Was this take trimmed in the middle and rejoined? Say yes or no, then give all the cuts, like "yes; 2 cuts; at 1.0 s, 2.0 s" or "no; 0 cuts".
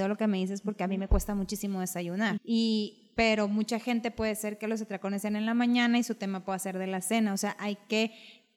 yes; 1 cut; at 2.4 s